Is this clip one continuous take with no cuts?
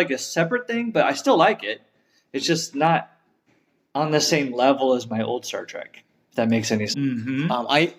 no; 1 cut; at 6.9 s

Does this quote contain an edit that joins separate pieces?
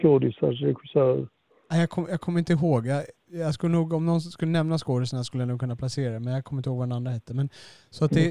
no; 0 cuts

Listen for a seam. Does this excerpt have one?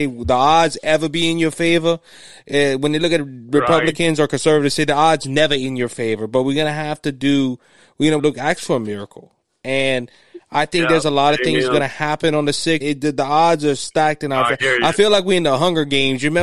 yes; 2 cuts; at 8.2 s, 12.8 s

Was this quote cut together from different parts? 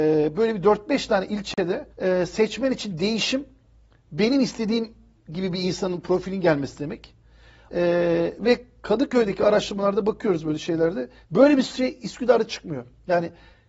yes; 3 cuts; at 1.9 s, 7.7 s, 11.2 s

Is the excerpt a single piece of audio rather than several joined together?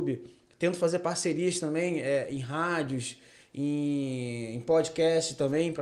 yes; 0 cuts

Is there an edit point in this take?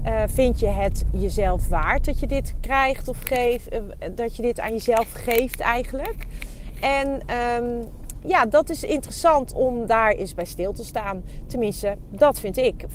no; 0 cuts

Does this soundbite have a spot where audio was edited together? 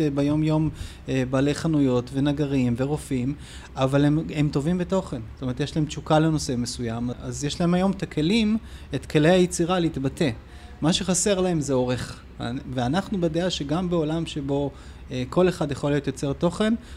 yes; 1 cut; at 7.1 s

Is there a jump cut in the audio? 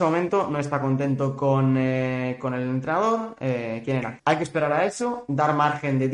yes; 1 cut; at 4.2 s

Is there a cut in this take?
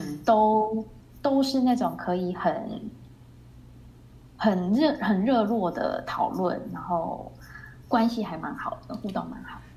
no; 0 cuts

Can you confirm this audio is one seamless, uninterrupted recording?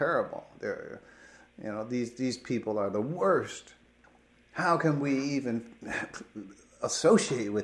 yes; 0 cuts

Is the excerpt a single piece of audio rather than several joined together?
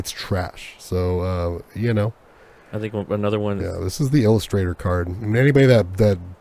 no; 1 cut; at 3.6 s

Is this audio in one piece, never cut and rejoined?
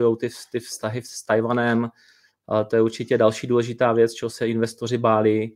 yes; 0 cuts

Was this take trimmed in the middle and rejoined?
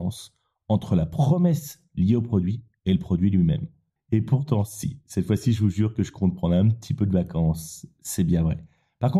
yes; 1 cut; at 4.0 s

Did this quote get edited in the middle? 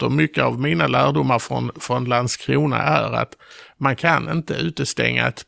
no; 0 cuts

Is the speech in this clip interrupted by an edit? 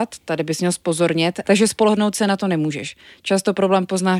yes; 1 cut; at 1.4 s

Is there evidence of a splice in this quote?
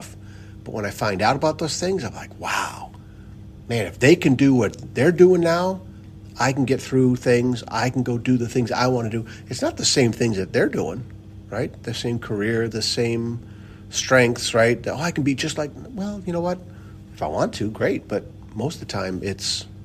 yes; 1 cut; at 12.7 s

